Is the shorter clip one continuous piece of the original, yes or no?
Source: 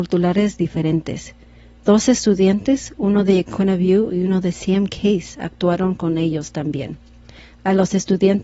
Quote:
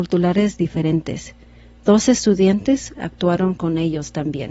no